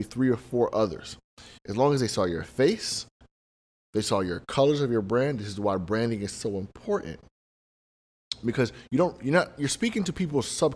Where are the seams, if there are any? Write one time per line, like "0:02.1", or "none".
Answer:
0:01.6